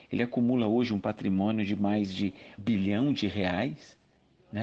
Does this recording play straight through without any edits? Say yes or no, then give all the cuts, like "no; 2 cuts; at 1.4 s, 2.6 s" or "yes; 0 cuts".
no; 1 cut; at 2.6 s